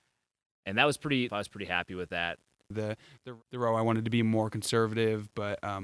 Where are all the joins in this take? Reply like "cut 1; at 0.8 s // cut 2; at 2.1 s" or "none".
cut 1; at 1.3 s // cut 2; at 2.7 s